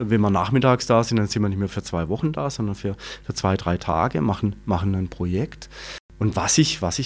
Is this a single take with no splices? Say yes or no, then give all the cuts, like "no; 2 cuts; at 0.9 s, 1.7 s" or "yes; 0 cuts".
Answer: yes; 0 cuts